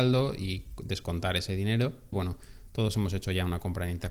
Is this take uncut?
no; 1 cut; at 2.1 s

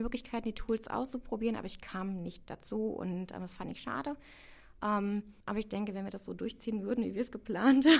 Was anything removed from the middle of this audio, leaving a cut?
yes; 1 cut; at 5.4 s

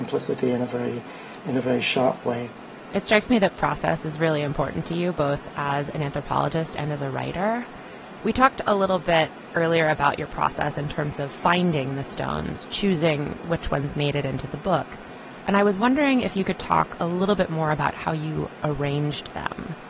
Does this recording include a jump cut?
no; 0 cuts

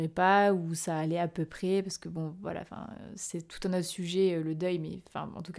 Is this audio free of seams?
yes; 0 cuts

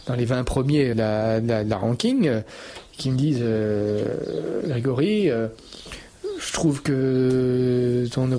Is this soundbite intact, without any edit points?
no; 1 cut; at 0.9 s

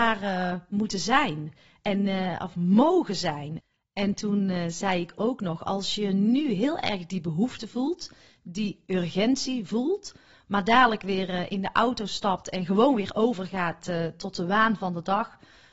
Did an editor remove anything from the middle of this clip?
no; 0 cuts

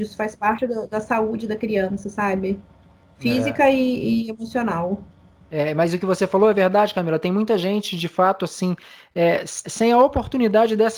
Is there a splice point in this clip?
yes; 1 cut; at 9.6 s

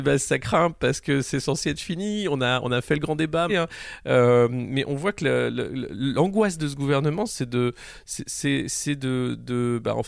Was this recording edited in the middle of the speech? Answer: yes; 1 cut; at 3.5 s

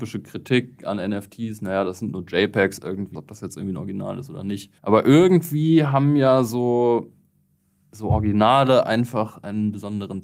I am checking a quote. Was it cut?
yes; 2 cuts; at 3.1 s, 4.8 s

